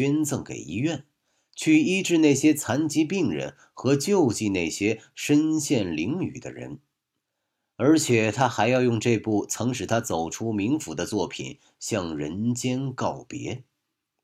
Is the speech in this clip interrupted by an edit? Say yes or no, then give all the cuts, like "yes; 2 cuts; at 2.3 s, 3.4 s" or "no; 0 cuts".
no; 0 cuts